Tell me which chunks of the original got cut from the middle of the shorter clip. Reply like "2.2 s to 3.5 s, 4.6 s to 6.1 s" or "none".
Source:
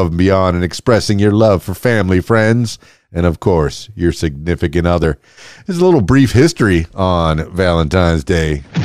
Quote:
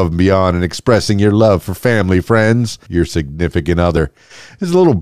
2.9 s to 3.9 s